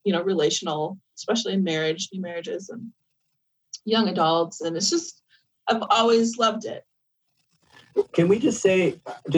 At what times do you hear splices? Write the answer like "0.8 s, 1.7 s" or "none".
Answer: none